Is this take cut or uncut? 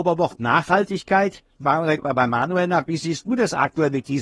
uncut